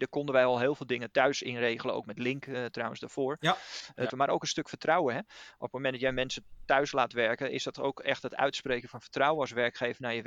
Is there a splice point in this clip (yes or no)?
yes